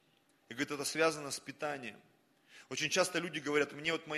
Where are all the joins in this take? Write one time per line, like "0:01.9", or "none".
none

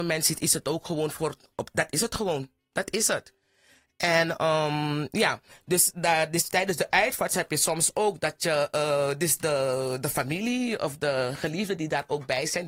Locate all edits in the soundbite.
none

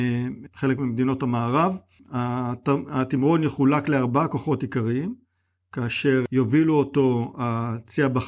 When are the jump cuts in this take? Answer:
none

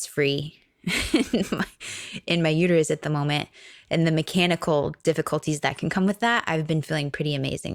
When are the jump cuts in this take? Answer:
none

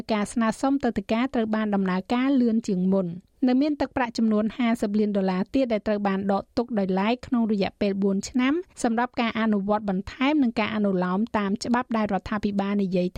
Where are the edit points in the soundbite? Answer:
0:03.4
0:08.7

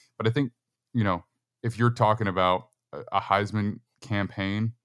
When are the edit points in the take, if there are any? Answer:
none

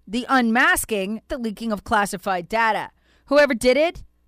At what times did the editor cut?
0:01.3

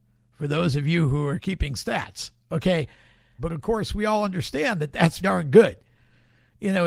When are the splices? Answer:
0:03.4
0:05.2

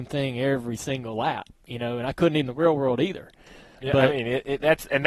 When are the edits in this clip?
none

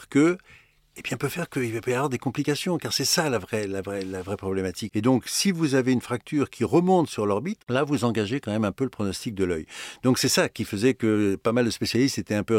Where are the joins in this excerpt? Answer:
0:04.9

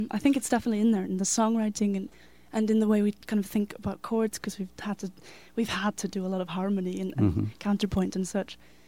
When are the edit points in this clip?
none

